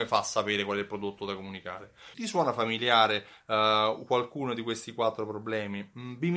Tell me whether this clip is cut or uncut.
cut